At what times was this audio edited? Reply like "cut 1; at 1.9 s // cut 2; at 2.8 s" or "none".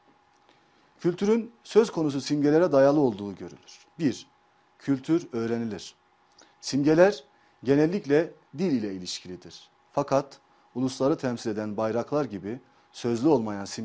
cut 1; at 3.9 s // cut 2; at 6.5 s